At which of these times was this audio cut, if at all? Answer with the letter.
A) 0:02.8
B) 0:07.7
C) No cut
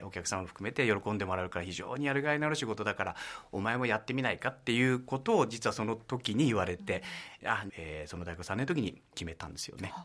B